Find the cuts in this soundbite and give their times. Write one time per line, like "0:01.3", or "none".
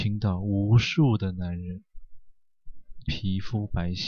0:03.0